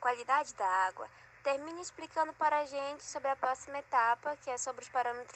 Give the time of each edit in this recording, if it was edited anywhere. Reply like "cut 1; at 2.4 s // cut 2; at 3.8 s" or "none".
none

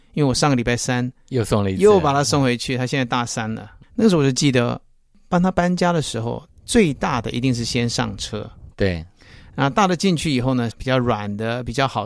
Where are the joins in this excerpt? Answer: cut 1; at 3.9 s // cut 2; at 6.5 s // cut 3; at 10.7 s

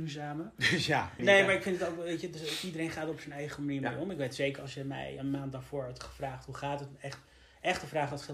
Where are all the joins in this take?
cut 1; at 1.2 s

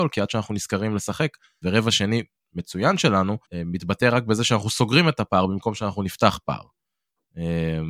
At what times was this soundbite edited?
cut 1; at 1.6 s // cut 2; at 3.4 s

